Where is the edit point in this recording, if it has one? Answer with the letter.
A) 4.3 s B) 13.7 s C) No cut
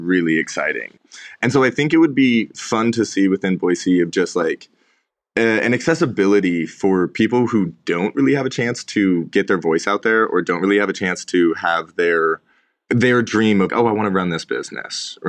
B